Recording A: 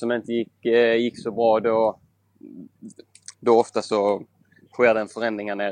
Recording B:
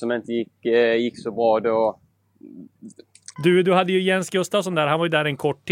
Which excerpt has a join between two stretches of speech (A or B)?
B